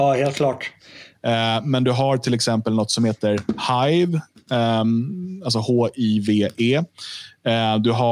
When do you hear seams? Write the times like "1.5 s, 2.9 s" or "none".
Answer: 1.1 s